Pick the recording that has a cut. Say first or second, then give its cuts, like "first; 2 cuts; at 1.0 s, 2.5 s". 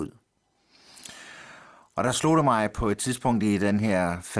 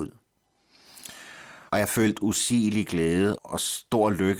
second; 2 cuts; at 1.7 s, 3.4 s